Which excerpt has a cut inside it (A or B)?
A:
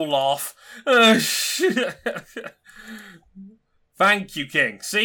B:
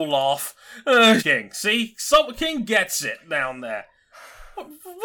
B